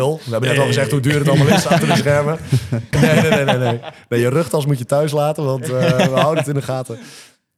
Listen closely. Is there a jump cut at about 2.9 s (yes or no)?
yes